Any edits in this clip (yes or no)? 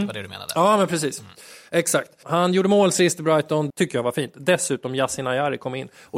yes